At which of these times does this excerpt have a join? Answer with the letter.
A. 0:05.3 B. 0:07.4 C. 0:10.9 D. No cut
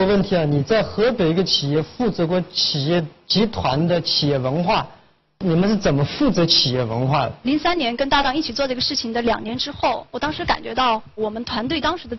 D